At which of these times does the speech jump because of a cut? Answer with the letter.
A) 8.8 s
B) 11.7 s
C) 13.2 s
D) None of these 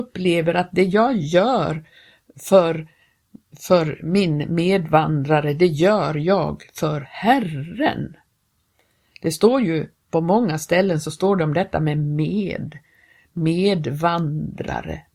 D